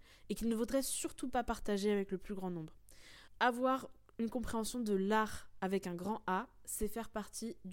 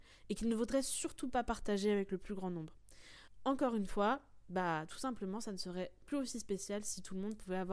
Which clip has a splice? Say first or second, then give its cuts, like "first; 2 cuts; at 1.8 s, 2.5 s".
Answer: first; 1 cut; at 3.4 s